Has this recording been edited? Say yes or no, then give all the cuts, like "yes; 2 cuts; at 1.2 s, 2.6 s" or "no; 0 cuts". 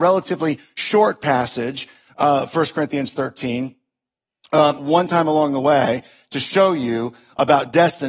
yes; 1 cut; at 4.8 s